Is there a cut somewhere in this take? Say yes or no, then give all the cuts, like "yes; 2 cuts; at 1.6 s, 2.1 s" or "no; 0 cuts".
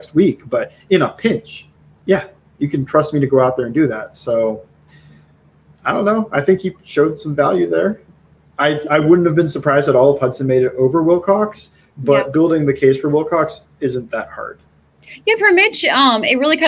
no; 0 cuts